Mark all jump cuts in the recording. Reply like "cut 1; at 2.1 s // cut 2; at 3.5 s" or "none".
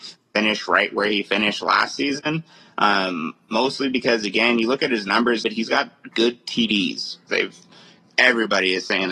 cut 1; at 5.4 s // cut 2; at 7.3 s

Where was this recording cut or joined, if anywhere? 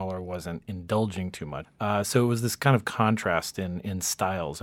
cut 1; at 1.6 s

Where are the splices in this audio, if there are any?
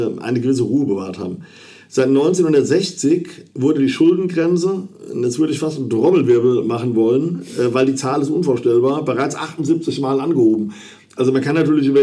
none

